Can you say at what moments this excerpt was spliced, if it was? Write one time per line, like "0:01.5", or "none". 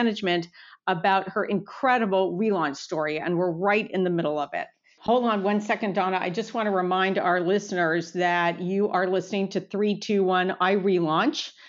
0:05.0